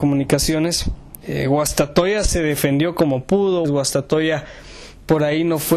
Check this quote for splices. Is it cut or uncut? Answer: cut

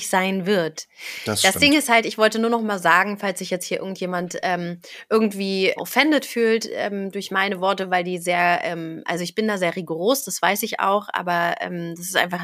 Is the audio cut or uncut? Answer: cut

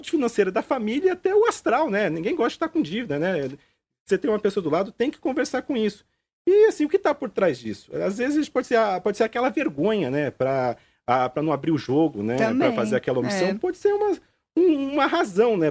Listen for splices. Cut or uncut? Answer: uncut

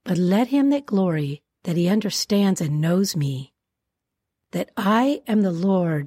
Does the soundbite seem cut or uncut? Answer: cut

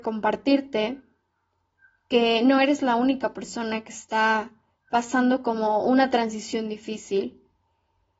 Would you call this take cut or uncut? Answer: uncut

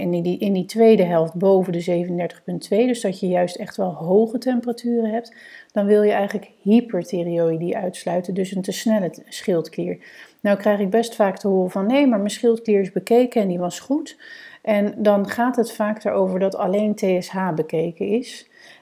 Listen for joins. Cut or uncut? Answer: uncut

